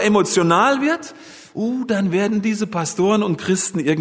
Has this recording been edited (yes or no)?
no